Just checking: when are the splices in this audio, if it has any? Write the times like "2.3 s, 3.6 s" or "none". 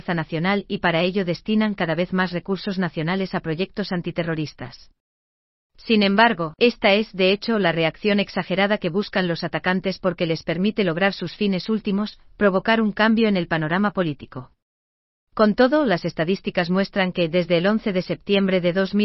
15.2 s